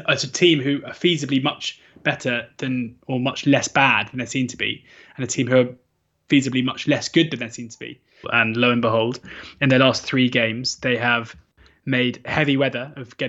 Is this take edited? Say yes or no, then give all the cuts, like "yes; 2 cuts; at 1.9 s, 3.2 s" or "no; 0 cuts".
yes; 1 cut; at 8.2 s